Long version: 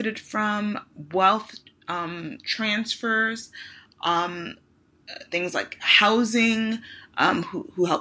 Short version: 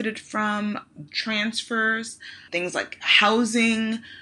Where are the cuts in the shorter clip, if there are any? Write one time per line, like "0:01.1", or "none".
0:01.1
0:02.5